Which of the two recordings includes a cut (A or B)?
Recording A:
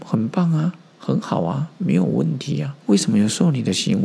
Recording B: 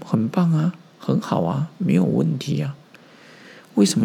A